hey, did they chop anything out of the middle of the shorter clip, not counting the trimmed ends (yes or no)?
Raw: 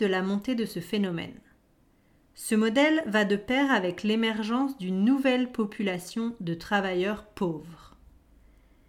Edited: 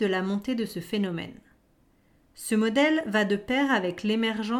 no